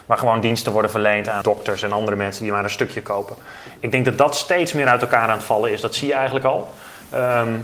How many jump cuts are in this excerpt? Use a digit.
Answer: 1